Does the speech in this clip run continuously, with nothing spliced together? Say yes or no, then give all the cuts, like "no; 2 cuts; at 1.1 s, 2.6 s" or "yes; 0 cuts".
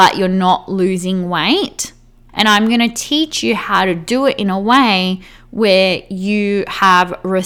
no; 1 cut; at 2.3 s